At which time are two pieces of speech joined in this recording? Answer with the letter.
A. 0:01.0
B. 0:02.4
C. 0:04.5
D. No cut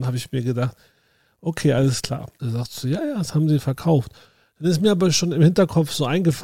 B